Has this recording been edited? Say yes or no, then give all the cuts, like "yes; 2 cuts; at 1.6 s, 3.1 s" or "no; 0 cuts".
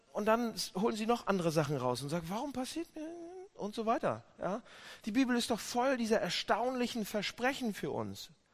no; 0 cuts